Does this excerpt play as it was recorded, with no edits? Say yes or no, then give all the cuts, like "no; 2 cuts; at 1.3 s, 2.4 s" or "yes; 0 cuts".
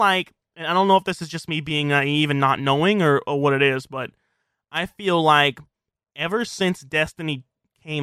yes; 0 cuts